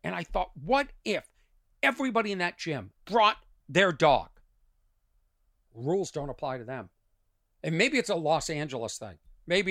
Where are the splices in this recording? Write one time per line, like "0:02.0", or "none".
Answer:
0:03.0
0:05.7